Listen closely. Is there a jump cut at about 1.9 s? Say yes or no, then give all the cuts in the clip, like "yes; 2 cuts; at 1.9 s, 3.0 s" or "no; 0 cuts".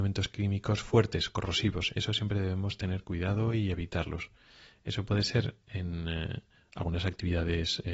yes; 1 cut; at 1.9 s